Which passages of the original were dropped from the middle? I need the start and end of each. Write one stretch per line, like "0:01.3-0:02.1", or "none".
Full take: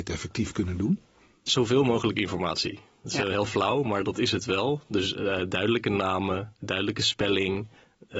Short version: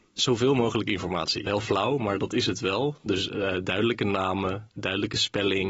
0:02.8-0:03.3